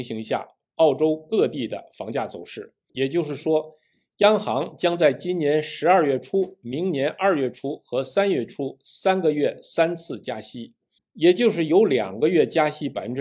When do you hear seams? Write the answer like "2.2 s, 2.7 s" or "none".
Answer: 2.9 s, 11.0 s